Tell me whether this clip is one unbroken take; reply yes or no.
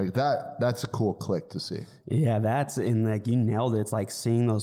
yes